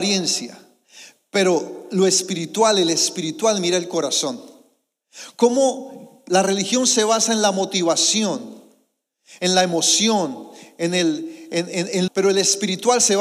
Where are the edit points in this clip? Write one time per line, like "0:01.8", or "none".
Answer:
0:12.1